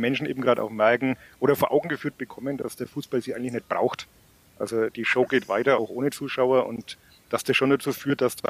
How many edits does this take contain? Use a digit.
0